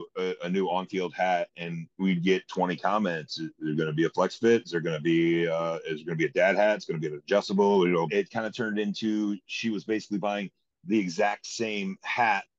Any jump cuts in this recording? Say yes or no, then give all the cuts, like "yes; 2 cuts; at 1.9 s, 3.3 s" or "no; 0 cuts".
yes; 2 cuts; at 8.1 s, 9.5 s